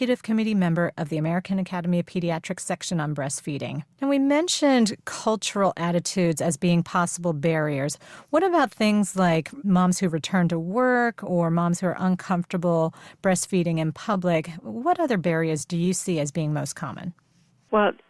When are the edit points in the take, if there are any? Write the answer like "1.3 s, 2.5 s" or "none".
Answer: 3.9 s